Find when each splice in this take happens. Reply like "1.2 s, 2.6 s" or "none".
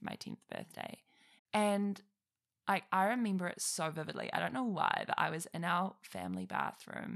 1.4 s